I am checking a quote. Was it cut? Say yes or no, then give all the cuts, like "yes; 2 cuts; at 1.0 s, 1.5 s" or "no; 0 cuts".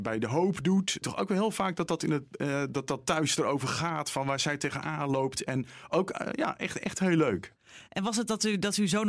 yes; 1 cut; at 1.0 s